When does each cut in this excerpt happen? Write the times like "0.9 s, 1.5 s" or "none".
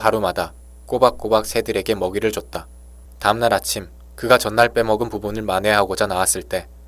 3.0 s